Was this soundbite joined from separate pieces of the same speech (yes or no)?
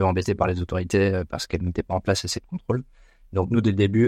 no